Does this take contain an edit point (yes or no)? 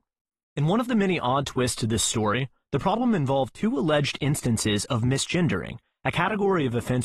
no